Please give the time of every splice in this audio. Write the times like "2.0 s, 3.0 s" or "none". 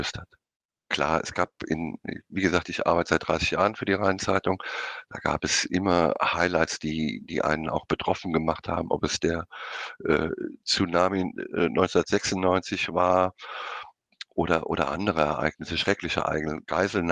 none